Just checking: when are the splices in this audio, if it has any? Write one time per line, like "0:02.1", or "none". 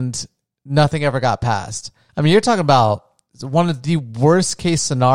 0:02.1